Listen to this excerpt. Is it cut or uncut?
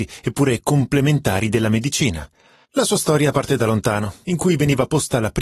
cut